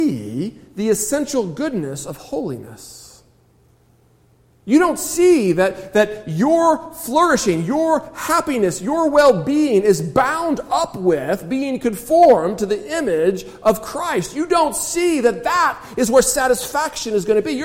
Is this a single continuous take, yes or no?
yes